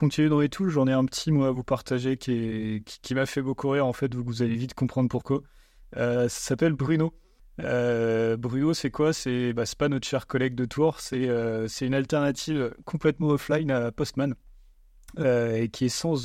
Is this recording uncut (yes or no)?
yes